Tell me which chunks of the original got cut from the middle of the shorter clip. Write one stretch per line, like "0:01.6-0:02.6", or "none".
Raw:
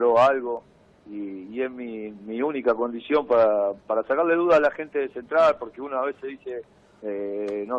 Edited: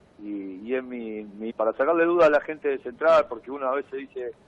0:02.4-0:03.8

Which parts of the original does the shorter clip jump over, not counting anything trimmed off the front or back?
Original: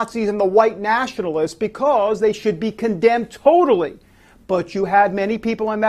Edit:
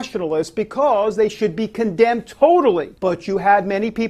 0:04.0-0:04.4

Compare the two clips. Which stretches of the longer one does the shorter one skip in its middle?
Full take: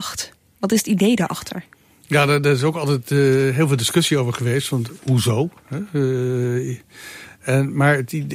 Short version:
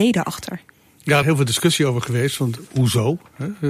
0:02.3-0:03.5

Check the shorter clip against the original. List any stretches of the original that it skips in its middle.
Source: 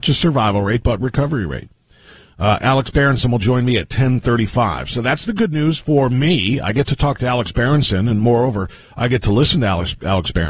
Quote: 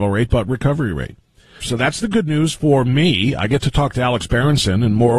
0:02.1-0:04.9

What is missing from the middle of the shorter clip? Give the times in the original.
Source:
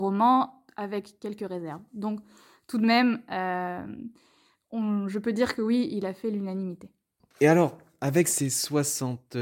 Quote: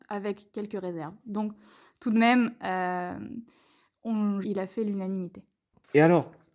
0:05.1-0:05.9

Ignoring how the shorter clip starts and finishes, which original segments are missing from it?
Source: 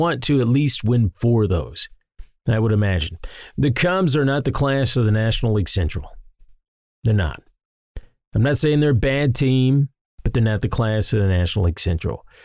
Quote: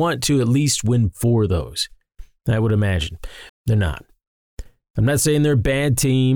0:03.5-0:06.9

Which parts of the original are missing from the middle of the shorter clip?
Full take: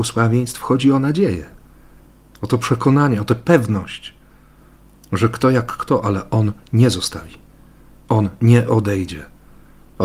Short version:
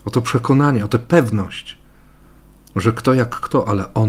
none

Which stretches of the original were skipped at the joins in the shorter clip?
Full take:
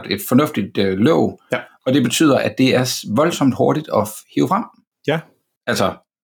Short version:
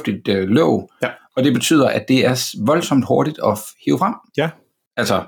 0:04.8-0:05.0

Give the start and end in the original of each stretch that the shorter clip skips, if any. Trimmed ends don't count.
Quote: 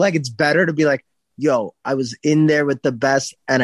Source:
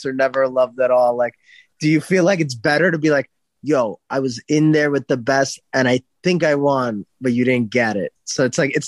none

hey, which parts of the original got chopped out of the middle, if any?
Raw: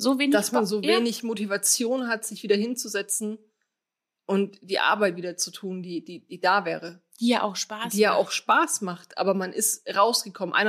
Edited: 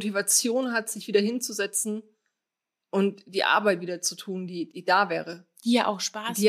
0:06.1-0:06.3

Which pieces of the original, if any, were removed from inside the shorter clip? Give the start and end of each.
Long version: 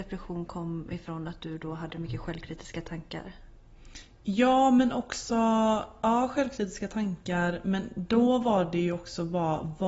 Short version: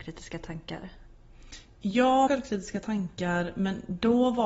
0:04.7-0:06.3

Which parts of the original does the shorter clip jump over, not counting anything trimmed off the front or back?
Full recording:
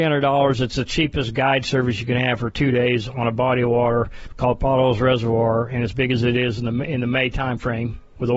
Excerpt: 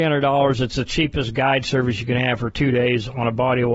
none

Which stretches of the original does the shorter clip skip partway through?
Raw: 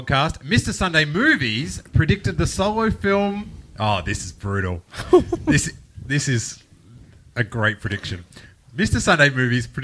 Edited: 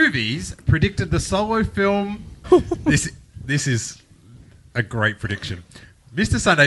0:03.7-0:05.0

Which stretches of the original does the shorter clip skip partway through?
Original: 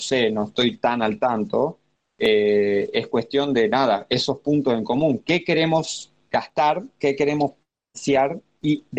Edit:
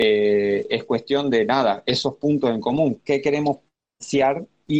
0:05.2-0:06.9

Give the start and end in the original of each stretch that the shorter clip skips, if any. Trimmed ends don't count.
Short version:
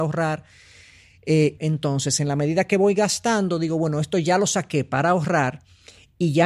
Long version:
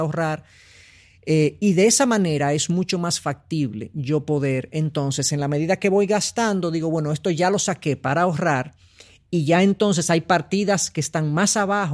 0:01.6-0:04.7

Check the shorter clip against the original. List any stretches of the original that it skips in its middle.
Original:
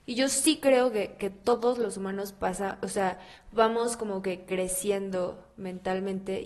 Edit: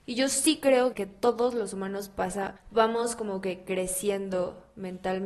0:00.9-0:01.2
0:02.8-0:03.4

